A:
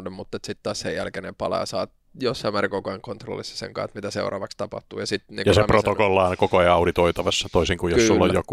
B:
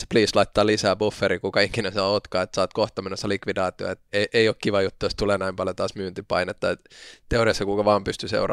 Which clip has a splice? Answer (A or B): B